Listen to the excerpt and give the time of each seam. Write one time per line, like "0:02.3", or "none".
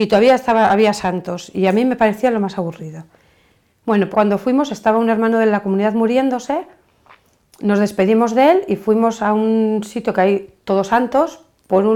0:04.1